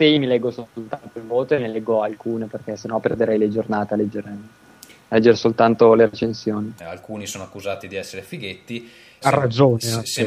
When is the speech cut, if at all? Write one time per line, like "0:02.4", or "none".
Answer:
0:06.8
0:09.2